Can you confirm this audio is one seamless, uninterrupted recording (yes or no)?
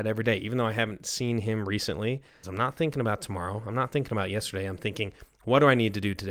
no